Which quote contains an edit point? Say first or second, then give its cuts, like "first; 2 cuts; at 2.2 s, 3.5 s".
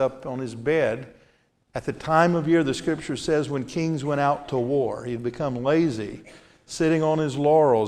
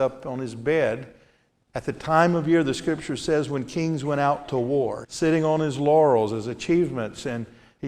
second; 1 cut; at 5.0 s